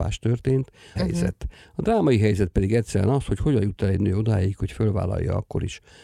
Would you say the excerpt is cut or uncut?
cut